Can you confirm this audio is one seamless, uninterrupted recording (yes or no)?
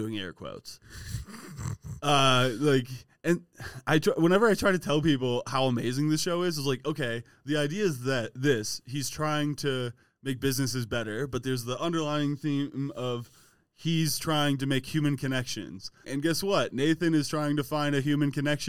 no